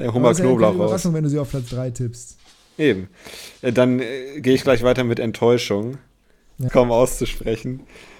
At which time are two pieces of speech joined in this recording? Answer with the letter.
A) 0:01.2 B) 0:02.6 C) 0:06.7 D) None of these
C